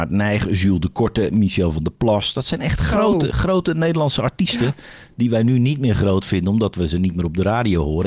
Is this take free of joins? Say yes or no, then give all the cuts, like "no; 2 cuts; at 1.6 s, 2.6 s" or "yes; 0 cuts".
yes; 0 cuts